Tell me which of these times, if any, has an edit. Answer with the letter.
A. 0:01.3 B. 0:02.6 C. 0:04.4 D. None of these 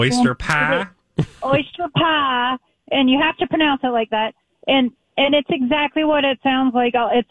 D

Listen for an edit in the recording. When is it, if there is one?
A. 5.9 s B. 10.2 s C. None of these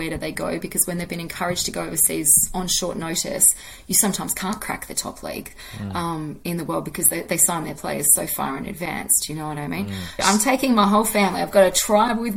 B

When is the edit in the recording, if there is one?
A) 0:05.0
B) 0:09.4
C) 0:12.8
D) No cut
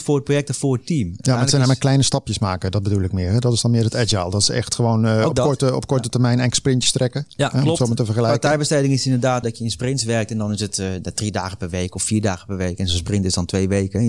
B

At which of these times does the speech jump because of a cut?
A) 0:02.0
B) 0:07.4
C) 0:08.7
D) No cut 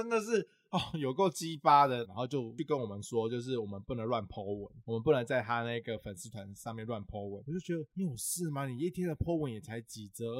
A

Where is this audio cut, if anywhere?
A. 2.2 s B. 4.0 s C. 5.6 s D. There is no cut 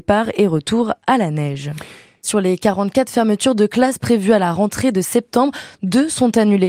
A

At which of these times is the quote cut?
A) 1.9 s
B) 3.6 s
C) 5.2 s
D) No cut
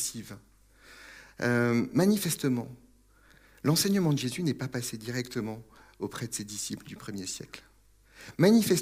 D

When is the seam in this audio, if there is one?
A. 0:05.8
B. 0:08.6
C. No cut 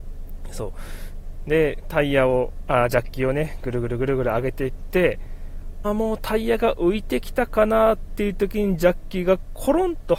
A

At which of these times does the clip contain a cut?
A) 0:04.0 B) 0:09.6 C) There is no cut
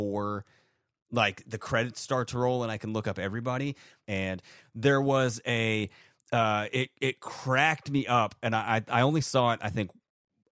A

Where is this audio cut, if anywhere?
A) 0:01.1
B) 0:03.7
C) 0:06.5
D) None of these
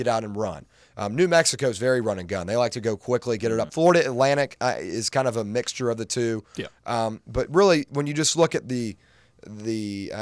B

